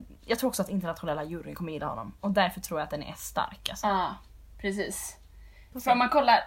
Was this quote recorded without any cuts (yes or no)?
yes